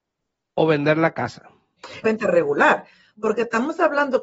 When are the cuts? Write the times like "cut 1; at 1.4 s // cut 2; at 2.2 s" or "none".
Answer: cut 1; at 2.0 s